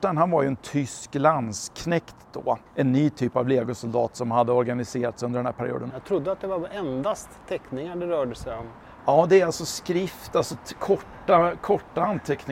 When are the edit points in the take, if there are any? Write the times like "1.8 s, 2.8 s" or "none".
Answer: 2.7 s, 5.9 s